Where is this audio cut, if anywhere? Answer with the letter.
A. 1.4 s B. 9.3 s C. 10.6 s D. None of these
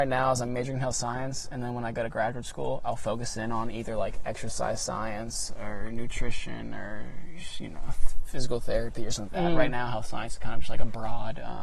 B